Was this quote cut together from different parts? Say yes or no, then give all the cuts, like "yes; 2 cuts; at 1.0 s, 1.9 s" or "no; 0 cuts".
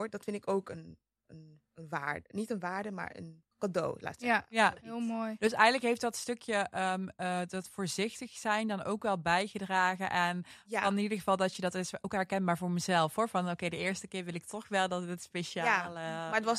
yes; 1 cut; at 3.5 s